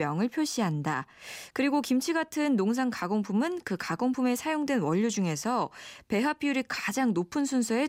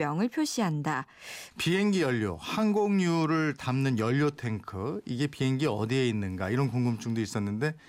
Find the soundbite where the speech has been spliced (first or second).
second